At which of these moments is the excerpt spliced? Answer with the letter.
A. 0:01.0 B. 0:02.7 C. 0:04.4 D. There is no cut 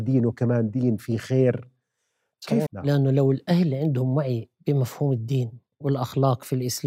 B